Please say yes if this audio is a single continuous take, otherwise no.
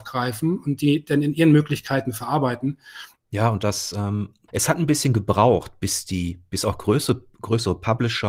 no